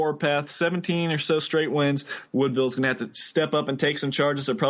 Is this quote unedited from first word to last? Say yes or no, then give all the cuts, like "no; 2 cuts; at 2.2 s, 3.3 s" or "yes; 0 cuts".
no; 1 cut; at 2.3 s